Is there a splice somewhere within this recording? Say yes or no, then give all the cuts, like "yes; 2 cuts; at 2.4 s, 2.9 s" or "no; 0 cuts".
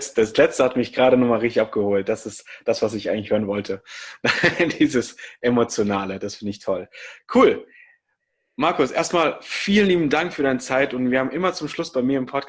no; 0 cuts